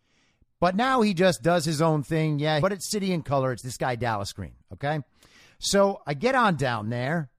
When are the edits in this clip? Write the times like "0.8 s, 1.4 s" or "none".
2.6 s